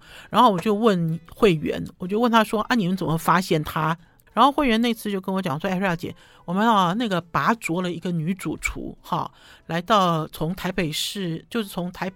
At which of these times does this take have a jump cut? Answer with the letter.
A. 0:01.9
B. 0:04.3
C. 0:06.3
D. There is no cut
B